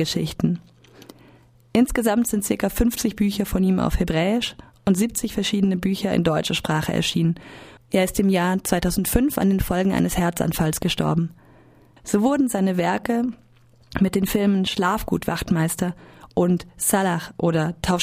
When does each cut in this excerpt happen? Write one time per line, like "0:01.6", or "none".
0:07.8
0:12.0